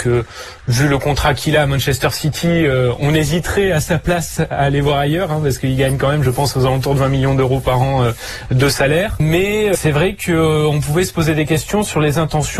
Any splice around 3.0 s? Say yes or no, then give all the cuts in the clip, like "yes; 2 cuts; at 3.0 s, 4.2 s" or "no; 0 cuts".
no; 0 cuts